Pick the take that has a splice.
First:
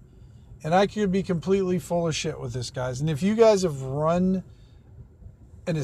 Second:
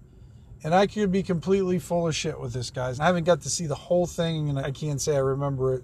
second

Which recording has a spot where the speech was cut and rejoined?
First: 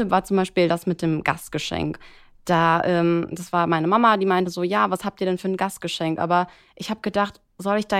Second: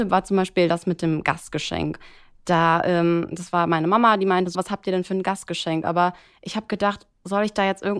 second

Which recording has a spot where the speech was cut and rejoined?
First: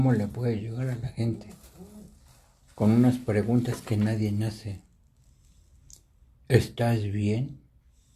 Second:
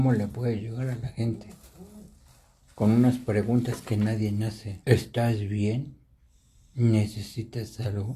second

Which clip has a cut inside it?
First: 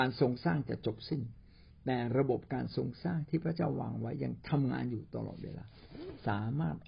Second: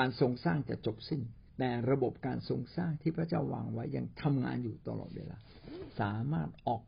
second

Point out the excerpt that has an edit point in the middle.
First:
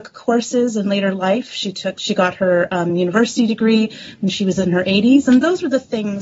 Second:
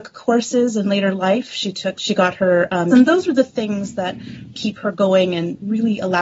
second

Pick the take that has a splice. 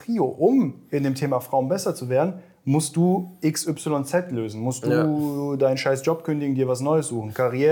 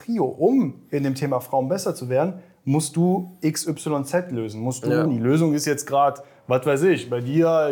second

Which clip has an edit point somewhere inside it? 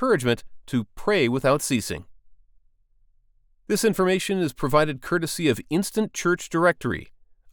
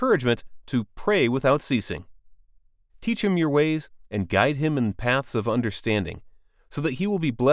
second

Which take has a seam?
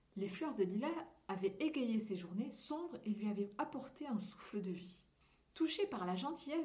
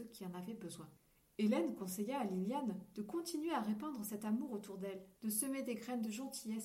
second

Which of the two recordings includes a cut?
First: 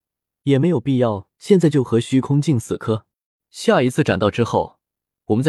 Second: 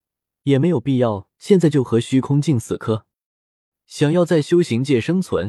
first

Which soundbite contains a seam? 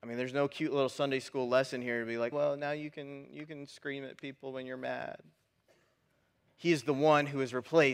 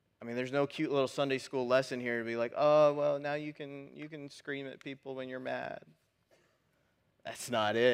first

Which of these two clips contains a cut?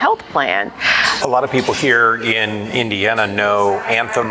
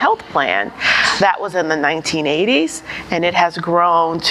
first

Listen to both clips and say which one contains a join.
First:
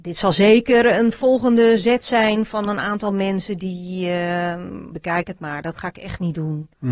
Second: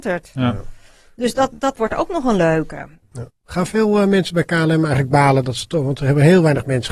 first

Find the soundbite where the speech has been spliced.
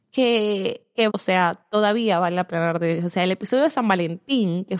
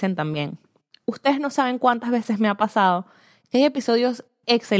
first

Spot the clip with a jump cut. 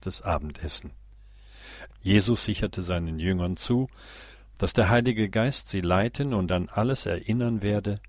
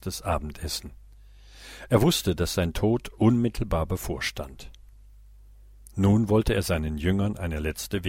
first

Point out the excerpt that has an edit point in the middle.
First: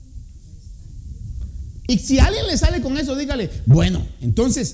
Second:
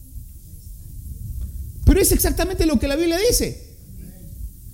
first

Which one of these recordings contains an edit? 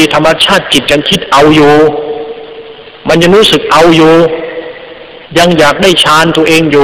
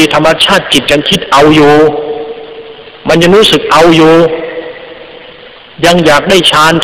first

